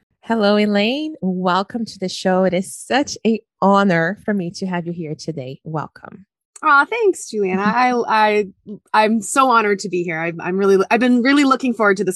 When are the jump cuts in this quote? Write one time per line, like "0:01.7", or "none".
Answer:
none